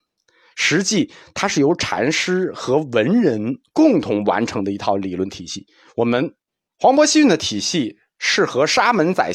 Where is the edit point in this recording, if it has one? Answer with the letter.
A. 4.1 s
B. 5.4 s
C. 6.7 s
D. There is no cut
C